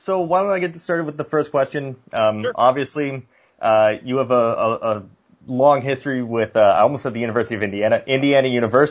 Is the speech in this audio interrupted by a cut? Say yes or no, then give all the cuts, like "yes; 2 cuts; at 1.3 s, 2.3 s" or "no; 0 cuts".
no; 0 cuts